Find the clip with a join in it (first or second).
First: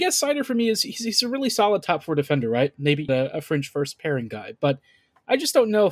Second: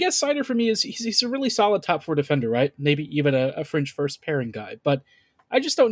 first